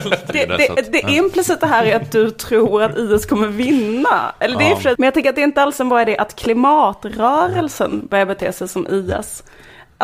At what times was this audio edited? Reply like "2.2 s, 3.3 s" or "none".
5.0 s